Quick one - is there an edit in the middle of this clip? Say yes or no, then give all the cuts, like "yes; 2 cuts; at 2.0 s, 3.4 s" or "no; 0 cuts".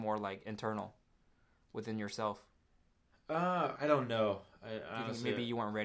yes; 1 cut; at 3.8 s